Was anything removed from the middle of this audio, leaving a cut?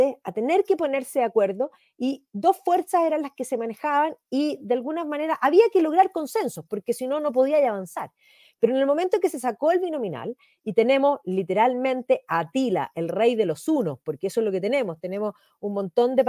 no; 0 cuts

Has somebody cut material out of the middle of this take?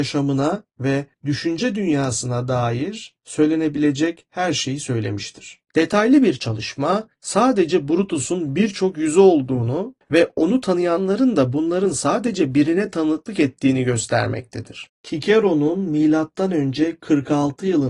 yes; 1 cut; at 5.6 s

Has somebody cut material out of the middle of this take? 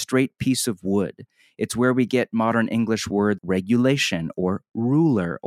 yes; 1 cut; at 3.4 s

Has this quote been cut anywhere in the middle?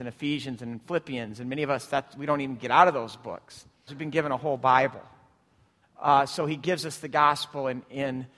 yes; 2 cuts; at 3.9 s, 5.8 s

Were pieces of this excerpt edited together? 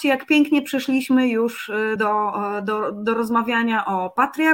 no; 0 cuts

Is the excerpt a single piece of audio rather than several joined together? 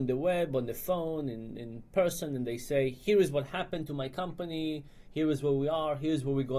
yes; 0 cuts

